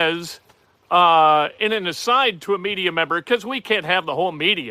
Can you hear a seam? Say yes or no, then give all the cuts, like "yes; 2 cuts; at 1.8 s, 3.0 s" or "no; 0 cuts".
no; 0 cuts